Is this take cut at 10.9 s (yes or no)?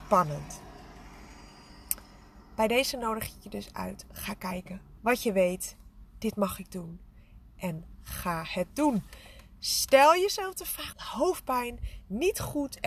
yes